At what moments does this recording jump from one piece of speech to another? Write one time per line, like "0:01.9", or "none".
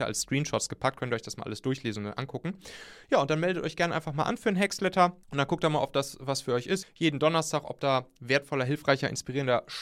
0:05.2
0:06.8